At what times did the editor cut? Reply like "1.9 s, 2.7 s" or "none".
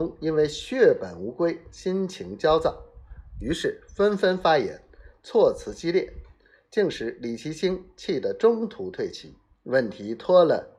9.5 s